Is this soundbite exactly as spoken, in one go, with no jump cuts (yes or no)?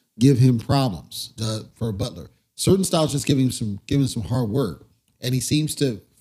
yes